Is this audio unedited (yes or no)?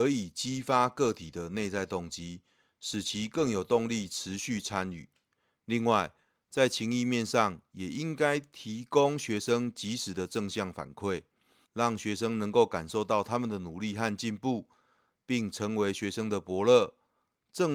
no